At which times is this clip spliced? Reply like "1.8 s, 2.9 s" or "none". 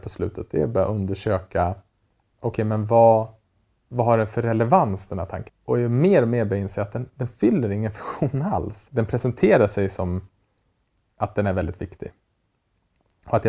5.5 s, 8.9 s